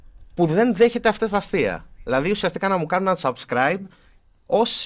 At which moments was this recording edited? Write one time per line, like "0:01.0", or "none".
none